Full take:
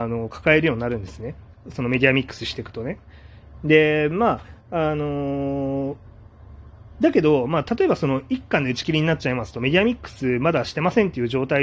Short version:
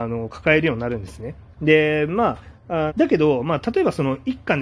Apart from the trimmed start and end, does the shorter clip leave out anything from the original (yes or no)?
yes